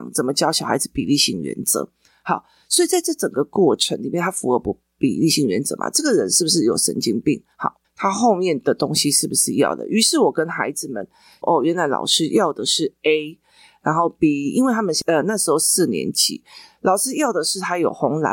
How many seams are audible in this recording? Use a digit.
2